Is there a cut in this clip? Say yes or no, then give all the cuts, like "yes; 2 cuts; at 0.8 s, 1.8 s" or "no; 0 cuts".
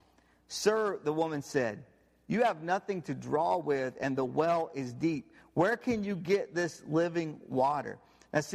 no; 0 cuts